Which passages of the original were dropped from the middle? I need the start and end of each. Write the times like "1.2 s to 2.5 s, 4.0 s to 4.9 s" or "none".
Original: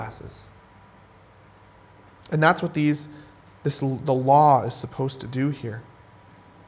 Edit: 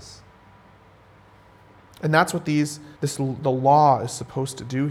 3.2 s to 3.6 s